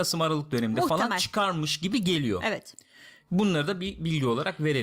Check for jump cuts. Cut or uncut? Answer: uncut